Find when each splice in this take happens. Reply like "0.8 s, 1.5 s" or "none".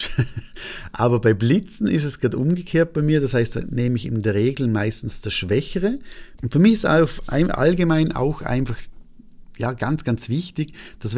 6.4 s